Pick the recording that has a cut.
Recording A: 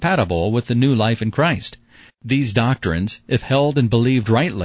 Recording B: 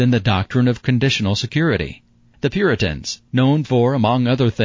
A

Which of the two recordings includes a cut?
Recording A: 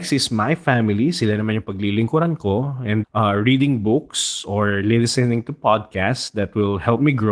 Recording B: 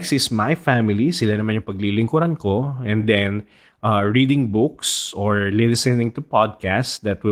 A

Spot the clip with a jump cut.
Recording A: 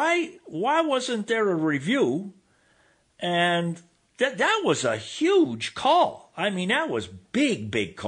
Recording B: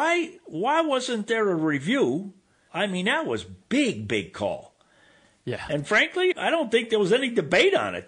B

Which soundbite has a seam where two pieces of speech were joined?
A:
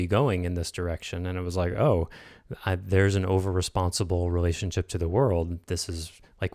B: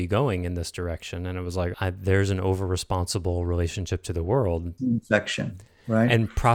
B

